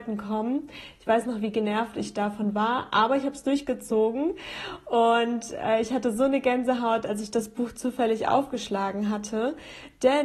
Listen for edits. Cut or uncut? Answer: uncut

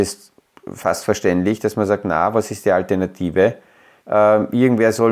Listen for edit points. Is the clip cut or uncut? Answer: cut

